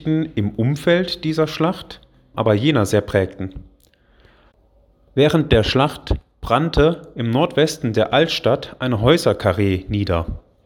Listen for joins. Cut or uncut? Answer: cut